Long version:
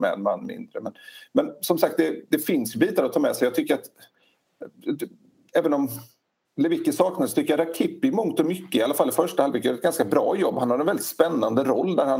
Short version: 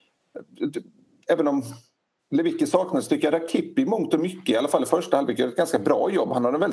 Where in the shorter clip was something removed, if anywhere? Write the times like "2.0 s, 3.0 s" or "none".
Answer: none